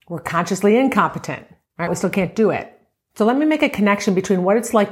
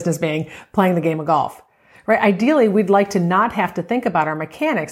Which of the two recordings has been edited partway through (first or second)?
first